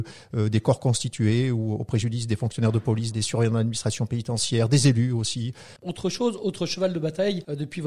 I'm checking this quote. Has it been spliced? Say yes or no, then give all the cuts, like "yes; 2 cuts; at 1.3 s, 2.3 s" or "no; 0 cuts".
yes; 2 cuts; at 3.1 s, 5.8 s